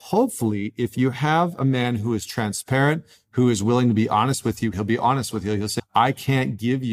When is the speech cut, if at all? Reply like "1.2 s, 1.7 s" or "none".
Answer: 4.7 s, 5.8 s